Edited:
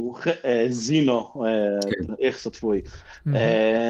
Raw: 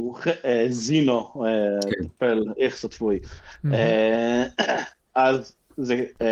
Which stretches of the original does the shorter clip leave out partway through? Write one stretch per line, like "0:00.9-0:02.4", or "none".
0:02.1-0:02.5